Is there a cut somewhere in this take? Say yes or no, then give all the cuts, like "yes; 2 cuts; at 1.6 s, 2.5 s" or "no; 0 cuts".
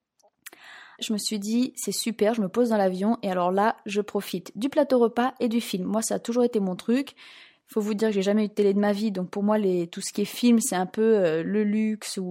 yes; 1 cut; at 1.0 s